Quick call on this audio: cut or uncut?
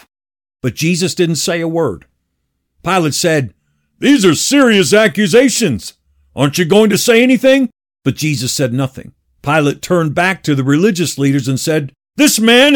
uncut